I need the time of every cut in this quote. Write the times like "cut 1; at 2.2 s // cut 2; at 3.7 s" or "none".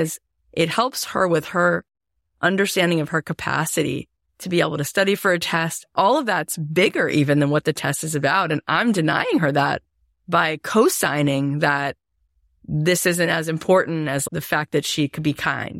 cut 1; at 14.3 s